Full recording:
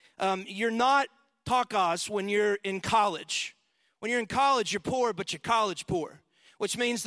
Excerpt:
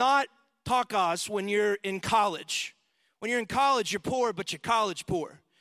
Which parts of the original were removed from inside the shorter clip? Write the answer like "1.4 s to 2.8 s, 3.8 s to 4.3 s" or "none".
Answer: none